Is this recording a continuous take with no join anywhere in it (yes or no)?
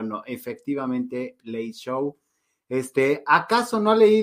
yes